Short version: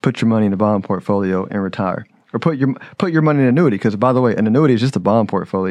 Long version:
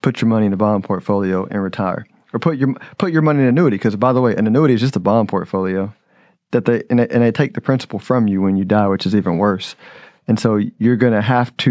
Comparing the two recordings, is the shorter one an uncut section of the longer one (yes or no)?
yes